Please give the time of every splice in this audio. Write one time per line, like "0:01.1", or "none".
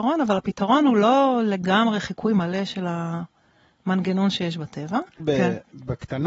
0:05.2